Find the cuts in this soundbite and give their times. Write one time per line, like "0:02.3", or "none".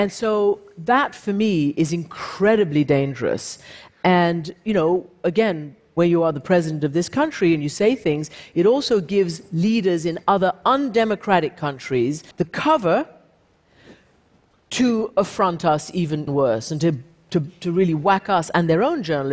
0:12.3
0:16.3